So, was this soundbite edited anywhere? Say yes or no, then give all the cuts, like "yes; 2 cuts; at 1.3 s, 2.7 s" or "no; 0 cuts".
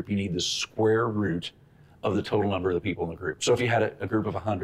no; 0 cuts